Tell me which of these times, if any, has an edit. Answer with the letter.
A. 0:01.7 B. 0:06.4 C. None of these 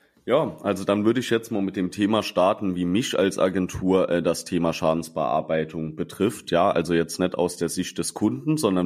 C